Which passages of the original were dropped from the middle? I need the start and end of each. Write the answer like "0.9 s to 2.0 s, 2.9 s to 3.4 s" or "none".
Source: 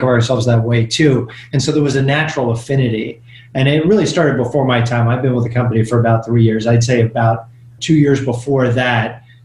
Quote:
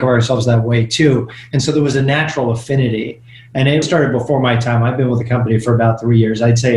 3.8 s to 4.1 s